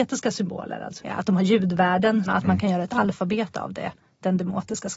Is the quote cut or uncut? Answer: cut